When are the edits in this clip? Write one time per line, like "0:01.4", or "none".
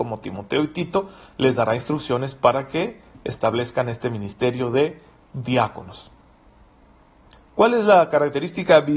none

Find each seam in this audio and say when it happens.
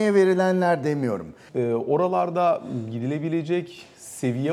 0:01.5

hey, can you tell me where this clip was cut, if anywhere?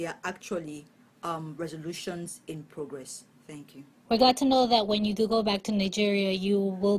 none

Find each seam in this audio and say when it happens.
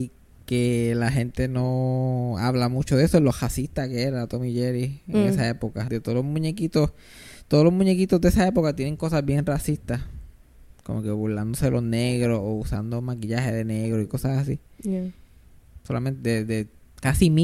0:05.9
0:15.8

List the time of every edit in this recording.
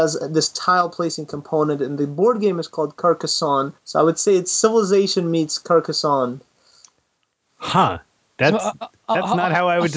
0:03.8

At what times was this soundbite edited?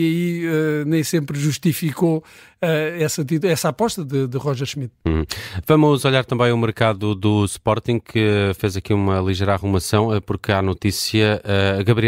none

